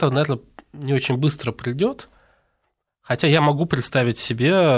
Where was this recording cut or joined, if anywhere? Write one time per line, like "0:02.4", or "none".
none

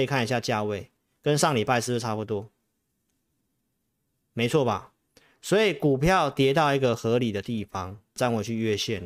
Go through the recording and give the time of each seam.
0:08.2

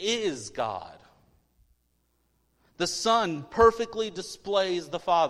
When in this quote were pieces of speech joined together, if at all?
none

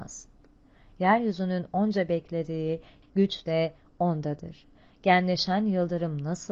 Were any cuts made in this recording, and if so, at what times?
0:03.0

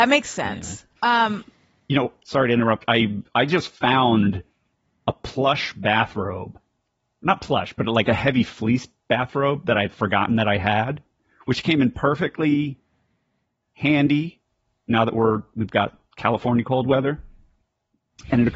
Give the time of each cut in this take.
0:01.0

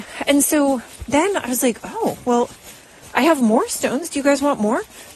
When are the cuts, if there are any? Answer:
none

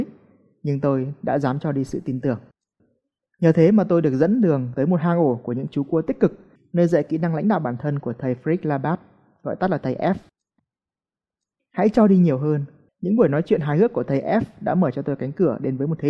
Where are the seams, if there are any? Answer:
0:06.6
0:10.6
0:12.9

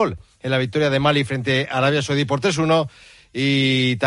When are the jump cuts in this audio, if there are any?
none

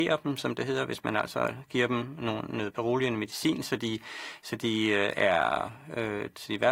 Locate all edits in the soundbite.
none

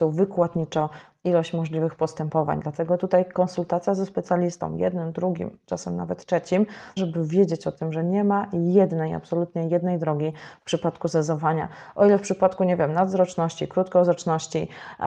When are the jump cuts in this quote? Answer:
0:07.0

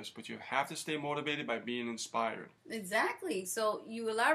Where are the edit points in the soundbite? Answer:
0:02.6

